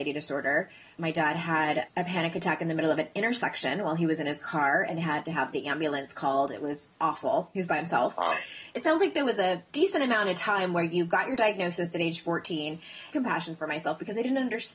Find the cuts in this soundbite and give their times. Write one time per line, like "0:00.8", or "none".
0:08.7
0:13.1

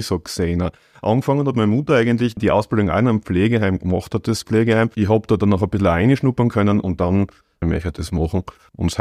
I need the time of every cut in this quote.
0:02.4
0:04.2
0:07.6

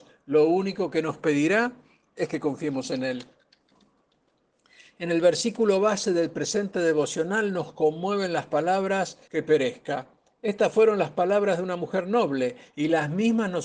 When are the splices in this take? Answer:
0:09.3

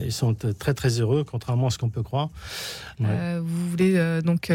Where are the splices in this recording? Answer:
0:03.0

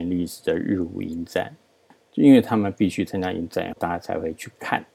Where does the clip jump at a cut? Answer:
0:02.0
0:03.8

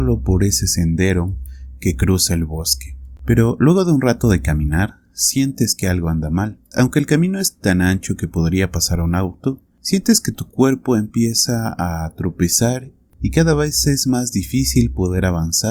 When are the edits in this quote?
0:06.7

